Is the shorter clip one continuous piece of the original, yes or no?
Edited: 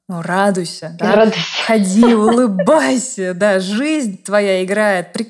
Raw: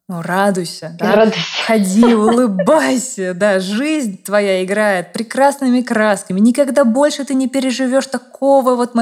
yes